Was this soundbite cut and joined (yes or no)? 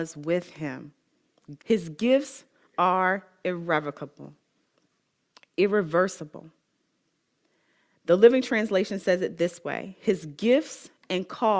yes